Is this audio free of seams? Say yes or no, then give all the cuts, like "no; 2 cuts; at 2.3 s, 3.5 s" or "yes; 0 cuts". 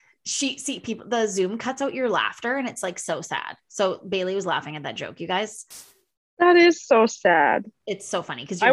yes; 0 cuts